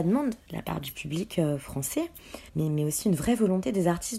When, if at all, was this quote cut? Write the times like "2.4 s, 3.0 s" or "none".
2.5 s